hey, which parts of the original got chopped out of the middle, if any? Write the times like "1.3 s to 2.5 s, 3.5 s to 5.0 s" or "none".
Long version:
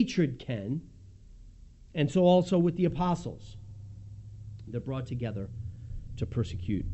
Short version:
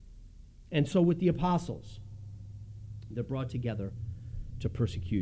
2.1 s to 2.5 s